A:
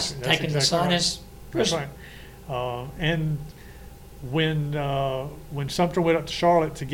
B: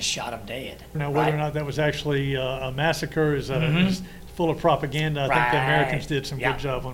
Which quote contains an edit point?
B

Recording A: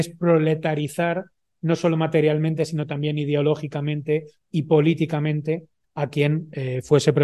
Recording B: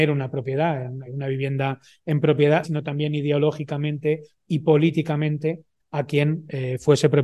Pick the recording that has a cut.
B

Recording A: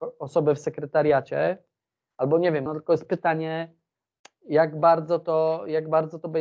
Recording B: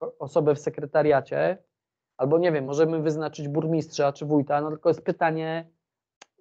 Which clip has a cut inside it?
A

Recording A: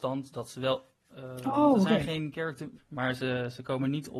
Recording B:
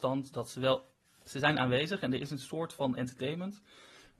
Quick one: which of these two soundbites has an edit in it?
A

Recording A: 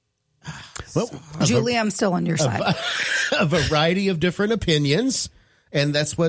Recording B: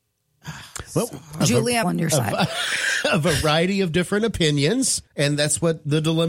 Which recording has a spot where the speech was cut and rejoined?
B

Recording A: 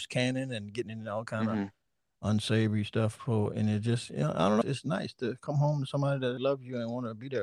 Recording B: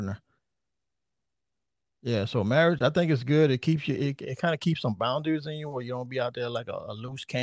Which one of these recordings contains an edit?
A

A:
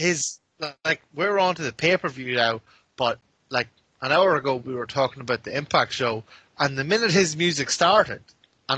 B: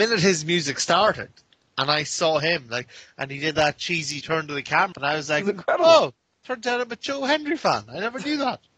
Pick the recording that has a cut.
B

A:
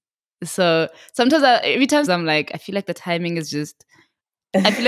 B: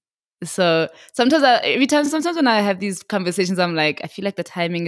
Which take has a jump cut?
A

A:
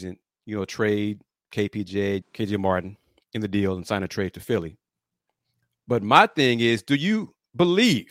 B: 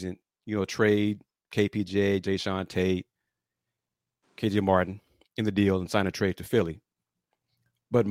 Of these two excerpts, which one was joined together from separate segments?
A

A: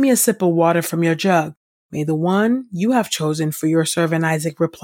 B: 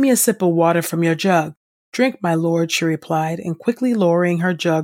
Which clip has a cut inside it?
A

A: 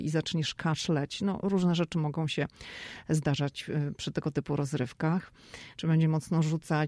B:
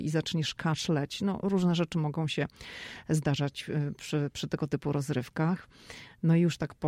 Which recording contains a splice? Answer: A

